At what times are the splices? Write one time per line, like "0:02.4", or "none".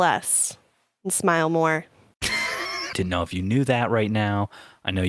0:02.9